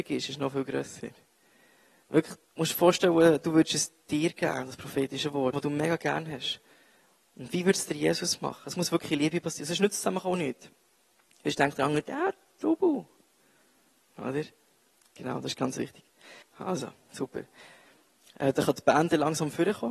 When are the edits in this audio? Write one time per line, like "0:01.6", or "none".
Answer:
0:02.4
0:05.5
0:16.4